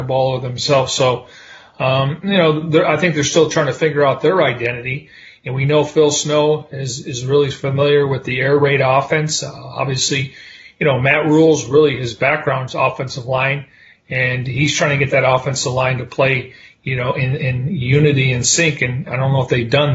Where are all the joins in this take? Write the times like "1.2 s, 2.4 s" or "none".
none